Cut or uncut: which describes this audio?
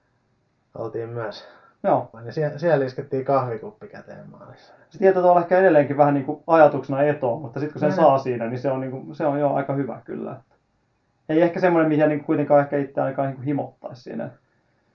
cut